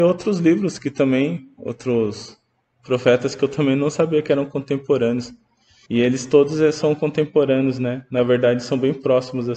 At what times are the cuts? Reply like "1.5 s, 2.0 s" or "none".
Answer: 5.9 s